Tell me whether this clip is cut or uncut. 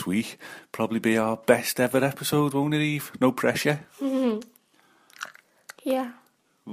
uncut